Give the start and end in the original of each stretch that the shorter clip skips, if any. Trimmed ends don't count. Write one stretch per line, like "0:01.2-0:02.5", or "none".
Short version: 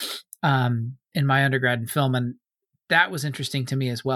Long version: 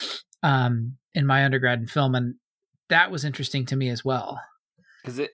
none